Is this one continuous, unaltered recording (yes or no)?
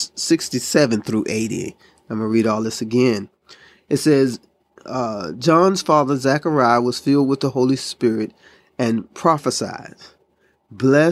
yes